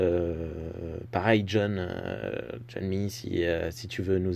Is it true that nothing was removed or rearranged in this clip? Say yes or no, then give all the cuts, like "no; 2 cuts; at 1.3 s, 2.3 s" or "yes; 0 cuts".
yes; 0 cuts